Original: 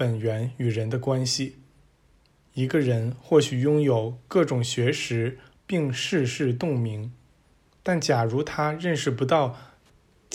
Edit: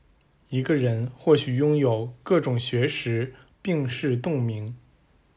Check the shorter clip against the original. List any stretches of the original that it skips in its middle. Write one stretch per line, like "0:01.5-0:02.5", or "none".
0:05.9-0:06.3